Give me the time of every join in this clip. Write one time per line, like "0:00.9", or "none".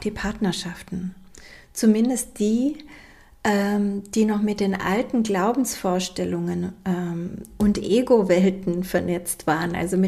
none